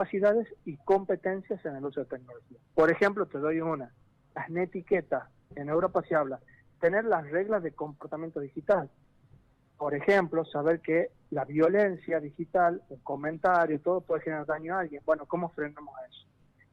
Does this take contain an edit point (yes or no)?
no